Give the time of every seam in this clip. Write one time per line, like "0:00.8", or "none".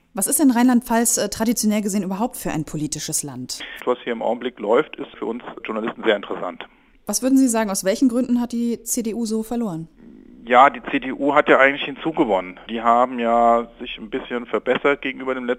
0:03.8